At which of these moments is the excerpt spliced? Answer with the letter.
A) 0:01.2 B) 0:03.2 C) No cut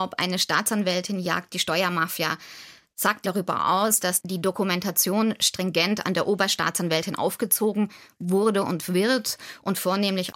B